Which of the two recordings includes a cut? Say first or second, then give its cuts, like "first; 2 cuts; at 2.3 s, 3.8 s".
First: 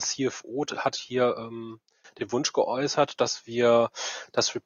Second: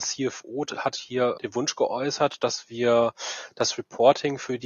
second; 1 cut; at 1.4 s